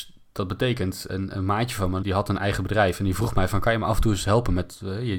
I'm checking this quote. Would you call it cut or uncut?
cut